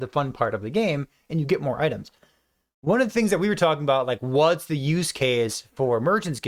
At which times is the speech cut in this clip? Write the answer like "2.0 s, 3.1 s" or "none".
none

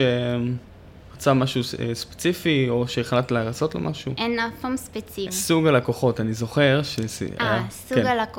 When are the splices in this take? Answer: 5.3 s

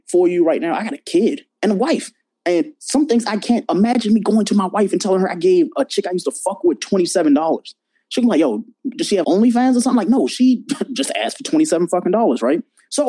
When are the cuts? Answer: 9.2 s

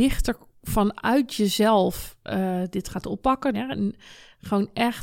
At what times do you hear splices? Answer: 3.5 s

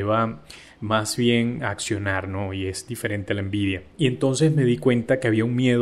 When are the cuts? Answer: 1.6 s

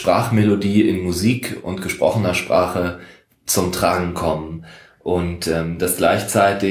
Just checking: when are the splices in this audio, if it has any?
none

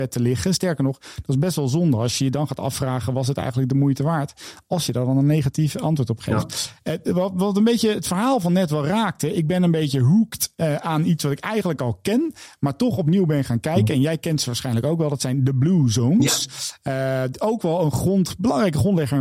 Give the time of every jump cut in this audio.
none

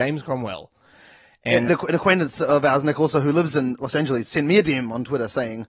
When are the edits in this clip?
1.7 s

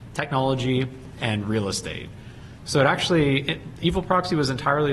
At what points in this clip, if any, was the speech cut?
2.6 s

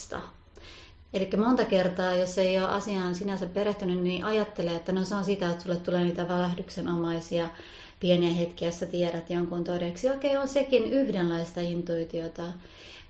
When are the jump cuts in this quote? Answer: none

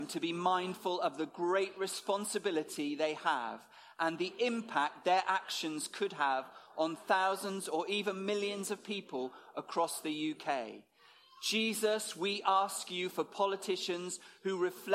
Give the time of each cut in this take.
none

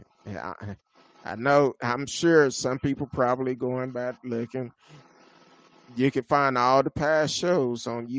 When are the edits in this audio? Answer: none

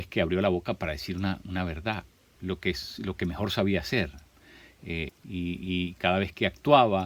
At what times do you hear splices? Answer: 2.4 s, 5.1 s

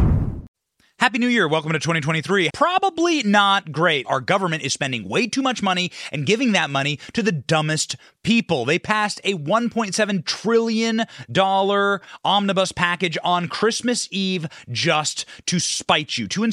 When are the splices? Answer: 2.5 s, 4.0 s

